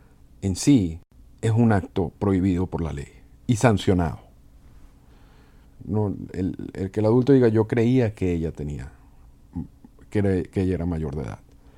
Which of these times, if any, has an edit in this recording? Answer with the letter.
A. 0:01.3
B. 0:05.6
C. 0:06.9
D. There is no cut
B